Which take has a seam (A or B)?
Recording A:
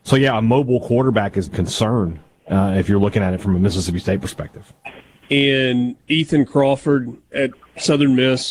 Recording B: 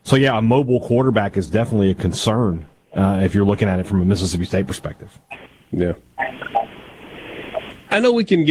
A